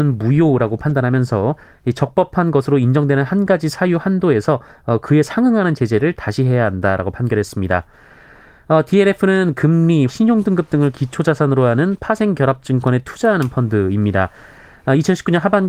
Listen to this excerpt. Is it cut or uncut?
cut